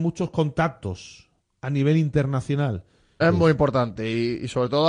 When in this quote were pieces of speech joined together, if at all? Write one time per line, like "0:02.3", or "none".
0:03.2